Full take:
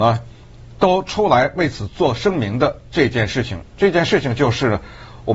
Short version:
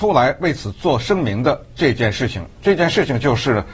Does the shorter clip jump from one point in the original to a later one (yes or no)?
no